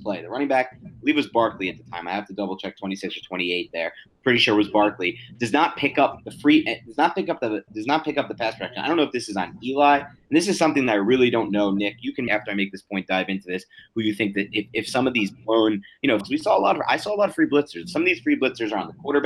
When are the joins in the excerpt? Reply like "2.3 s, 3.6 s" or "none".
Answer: 12.3 s, 16.2 s